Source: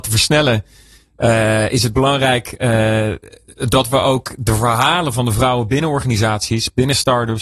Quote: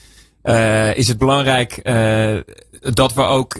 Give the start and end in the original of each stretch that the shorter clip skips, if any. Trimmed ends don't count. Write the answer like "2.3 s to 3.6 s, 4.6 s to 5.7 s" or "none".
none